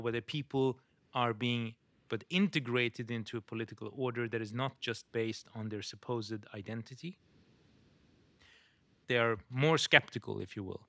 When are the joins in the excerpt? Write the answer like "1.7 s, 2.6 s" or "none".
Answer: 2.1 s, 9.0 s